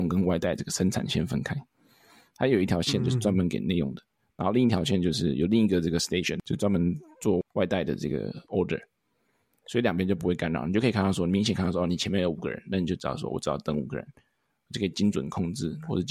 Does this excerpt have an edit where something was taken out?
no; 0 cuts

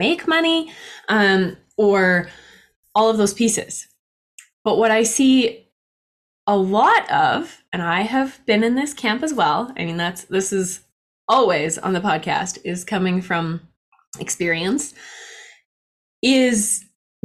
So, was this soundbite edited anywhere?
no; 0 cuts

